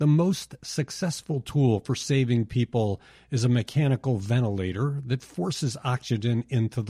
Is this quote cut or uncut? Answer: uncut